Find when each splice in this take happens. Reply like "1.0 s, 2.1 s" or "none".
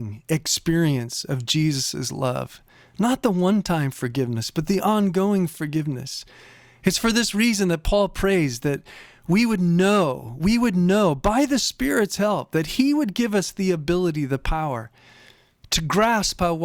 none